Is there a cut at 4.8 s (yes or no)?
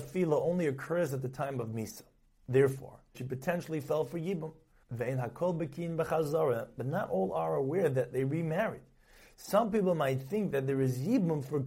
yes